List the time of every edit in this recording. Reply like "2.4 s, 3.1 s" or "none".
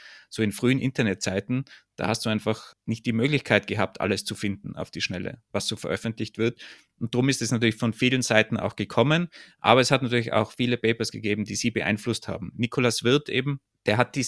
none